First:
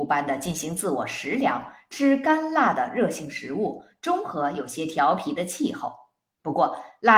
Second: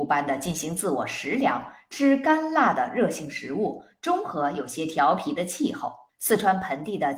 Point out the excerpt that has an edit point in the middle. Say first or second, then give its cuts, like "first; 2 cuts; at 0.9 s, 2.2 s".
second; 1 cut; at 6.1 s